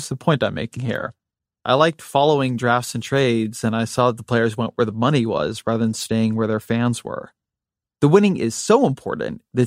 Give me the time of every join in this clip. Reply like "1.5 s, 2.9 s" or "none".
1.4 s, 7.9 s